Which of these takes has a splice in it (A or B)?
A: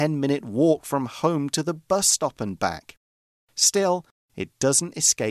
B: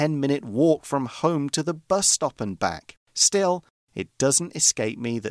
B